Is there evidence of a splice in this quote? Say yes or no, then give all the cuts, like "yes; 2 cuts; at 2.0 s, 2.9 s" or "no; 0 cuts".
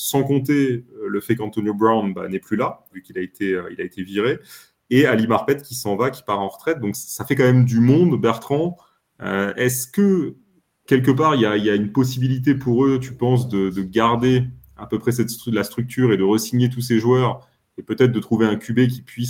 yes; 1 cut; at 2.9 s